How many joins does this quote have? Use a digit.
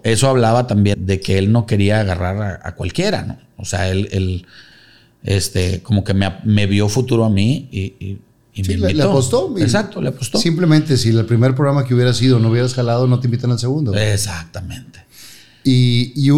1